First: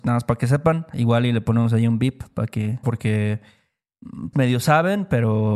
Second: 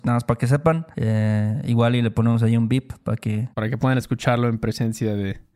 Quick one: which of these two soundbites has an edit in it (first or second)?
first